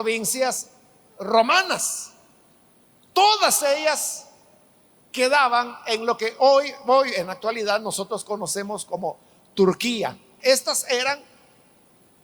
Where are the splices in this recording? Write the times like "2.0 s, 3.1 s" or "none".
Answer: 10.4 s

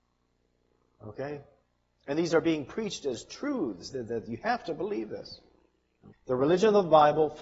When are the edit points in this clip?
3.9 s, 6.1 s

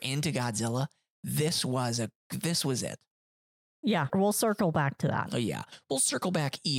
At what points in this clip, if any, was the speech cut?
2.2 s, 4.1 s

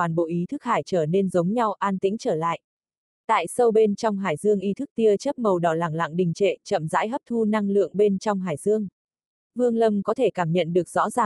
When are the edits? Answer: none

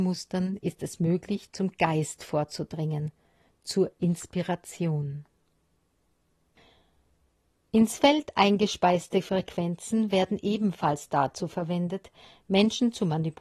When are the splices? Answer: none

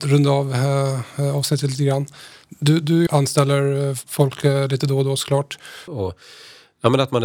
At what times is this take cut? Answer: 3.1 s, 5.9 s

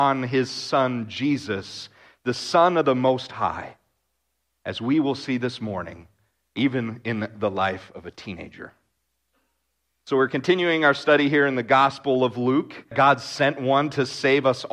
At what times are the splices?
12.9 s

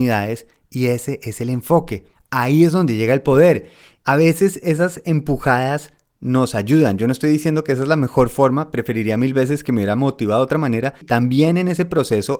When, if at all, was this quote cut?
2.1 s, 4.0 s, 11.0 s

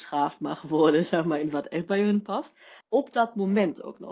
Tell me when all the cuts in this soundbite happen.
2.8 s

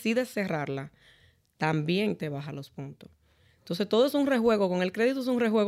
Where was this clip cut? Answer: none

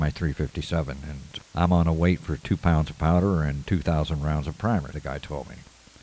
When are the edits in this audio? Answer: 1.4 s, 4.9 s

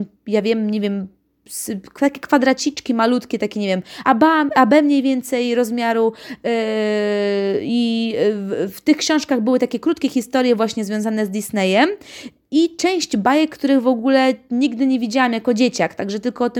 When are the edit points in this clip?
none

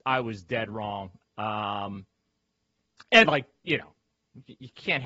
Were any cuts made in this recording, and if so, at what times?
1.3 s, 3.2 s

